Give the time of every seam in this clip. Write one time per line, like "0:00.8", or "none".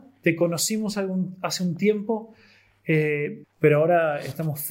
0:03.4